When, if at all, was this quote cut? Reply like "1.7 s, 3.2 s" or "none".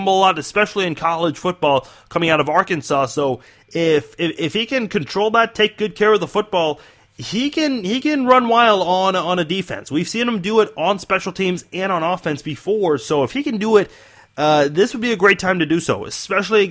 none